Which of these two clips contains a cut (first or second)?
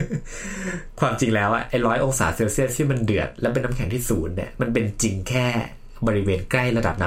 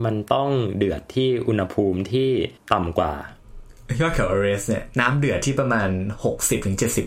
second